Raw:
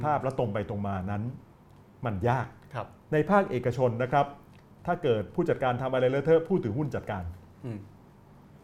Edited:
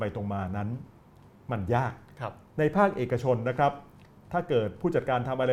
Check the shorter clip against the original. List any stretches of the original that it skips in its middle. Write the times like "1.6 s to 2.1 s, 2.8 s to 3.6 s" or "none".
none